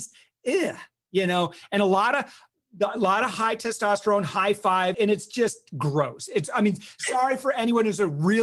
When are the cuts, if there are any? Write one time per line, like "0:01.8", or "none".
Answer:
0:04.9